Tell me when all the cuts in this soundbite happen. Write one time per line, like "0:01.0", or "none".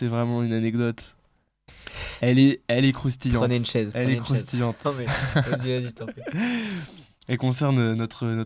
0:04.8